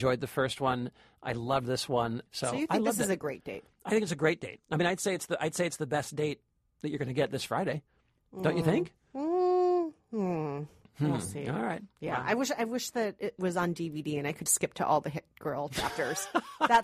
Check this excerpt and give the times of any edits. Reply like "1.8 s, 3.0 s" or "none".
14.5 s